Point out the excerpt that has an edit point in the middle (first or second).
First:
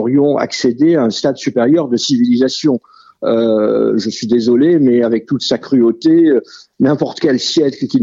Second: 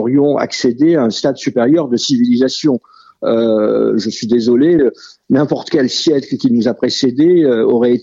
second